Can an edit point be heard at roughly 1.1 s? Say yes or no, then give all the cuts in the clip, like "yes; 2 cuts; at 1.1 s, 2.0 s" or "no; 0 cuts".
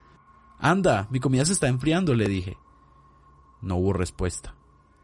no; 0 cuts